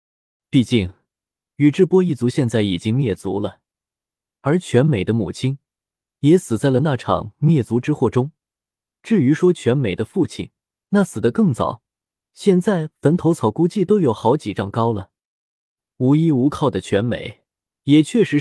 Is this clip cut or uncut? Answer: uncut